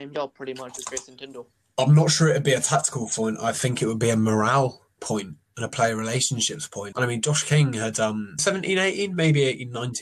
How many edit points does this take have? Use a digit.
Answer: 2